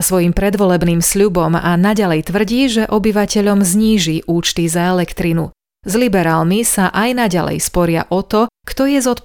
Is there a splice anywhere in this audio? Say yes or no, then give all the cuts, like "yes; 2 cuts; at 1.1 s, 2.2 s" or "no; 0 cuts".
no; 0 cuts